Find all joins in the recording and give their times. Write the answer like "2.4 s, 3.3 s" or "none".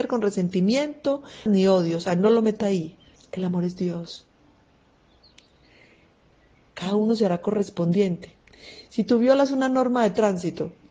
1.5 s, 3.2 s